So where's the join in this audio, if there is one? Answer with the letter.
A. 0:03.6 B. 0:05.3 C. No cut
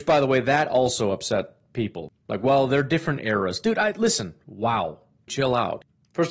B